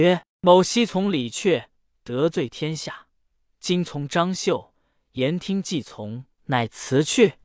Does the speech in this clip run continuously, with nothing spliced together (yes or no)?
no